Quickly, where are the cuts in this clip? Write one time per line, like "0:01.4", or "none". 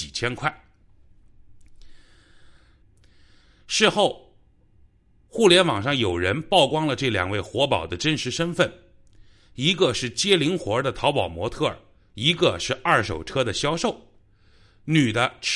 0:02.8